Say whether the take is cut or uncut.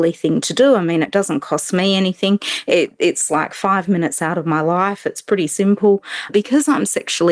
cut